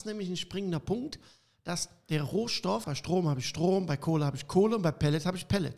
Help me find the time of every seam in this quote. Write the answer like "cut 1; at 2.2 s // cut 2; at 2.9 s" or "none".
cut 1; at 2.8 s

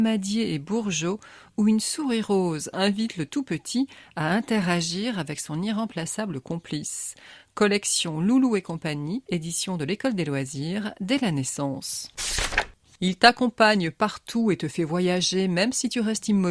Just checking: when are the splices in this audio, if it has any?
none

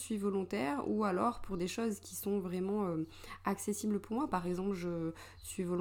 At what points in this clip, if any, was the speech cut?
none

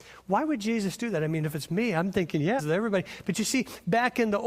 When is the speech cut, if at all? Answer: cut 1; at 2.6 s

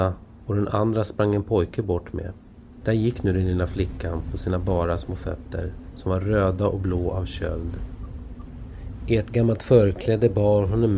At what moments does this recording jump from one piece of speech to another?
cut 1; at 2.8 s

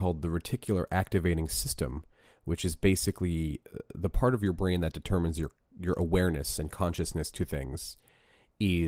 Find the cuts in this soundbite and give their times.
none

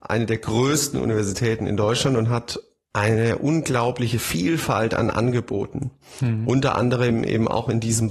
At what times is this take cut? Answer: none

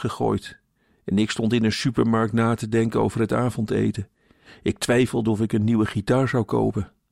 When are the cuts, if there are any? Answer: cut 1; at 4.5 s

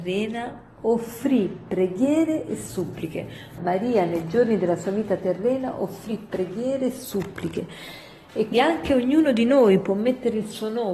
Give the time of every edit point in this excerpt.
cut 1; at 3.6 s // cut 2; at 8.5 s

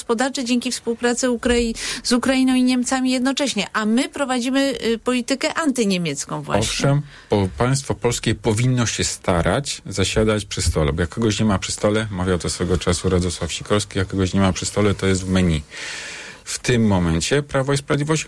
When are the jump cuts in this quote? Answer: cut 1; at 16.4 s

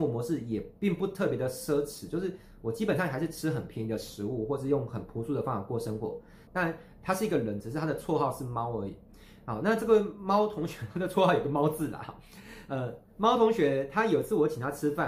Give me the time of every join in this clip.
cut 1; at 6.5 s

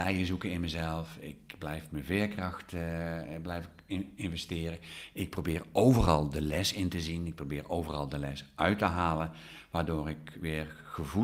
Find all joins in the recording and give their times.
none

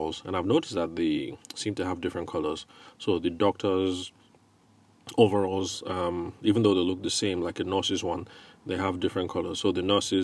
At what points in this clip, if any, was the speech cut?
none

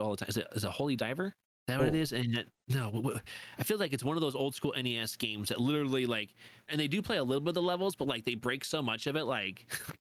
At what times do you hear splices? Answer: cut 1; at 6.7 s

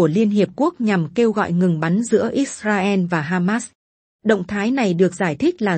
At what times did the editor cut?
none

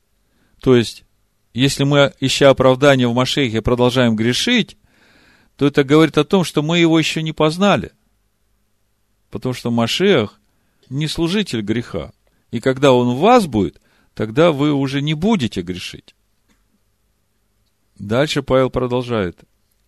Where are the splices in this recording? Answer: none

